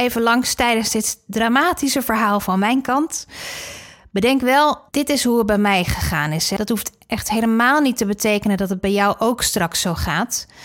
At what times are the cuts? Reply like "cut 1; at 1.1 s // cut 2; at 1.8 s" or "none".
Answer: cut 1; at 4.9 s